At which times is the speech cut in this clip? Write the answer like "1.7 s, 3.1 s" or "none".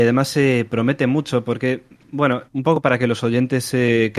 2.5 s